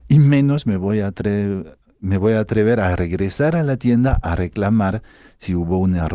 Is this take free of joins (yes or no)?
yes